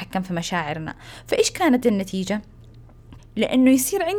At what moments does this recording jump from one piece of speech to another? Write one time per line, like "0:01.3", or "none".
0:03.2